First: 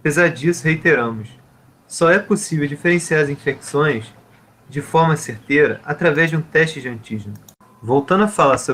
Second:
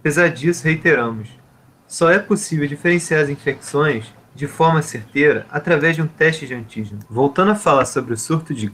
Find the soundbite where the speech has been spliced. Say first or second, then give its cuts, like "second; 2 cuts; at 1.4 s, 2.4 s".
second; 2 cuts; at 4.2 s, 7.1 s